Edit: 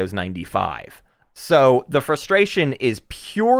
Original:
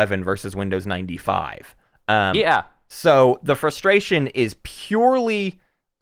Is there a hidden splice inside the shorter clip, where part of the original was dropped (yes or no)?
yes